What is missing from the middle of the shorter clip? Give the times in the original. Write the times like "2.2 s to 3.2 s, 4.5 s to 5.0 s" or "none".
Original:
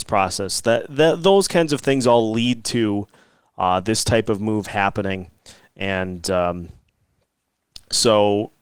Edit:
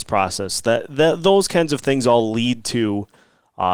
none